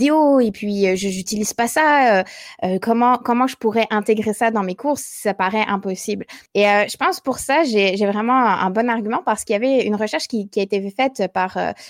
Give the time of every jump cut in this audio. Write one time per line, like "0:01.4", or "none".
0:06.5